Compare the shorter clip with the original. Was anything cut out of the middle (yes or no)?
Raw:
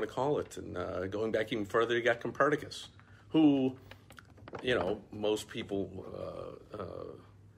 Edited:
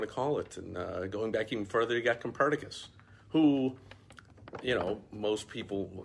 no